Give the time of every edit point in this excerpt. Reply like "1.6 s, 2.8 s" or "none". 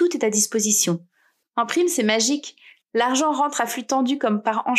1.4 s